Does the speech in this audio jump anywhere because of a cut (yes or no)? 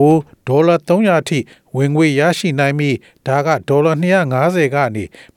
no